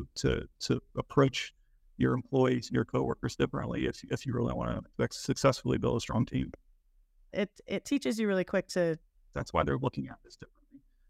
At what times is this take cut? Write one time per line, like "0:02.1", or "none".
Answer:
0:04.9
0:07.3
0:09.3